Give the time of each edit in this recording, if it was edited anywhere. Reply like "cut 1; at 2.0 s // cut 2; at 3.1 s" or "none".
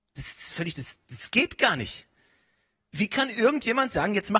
none